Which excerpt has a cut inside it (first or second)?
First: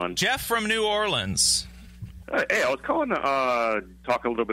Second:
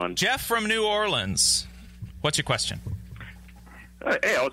first